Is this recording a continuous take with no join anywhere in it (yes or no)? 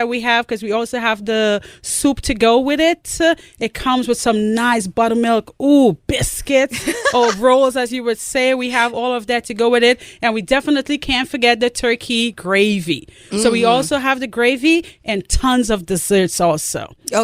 yes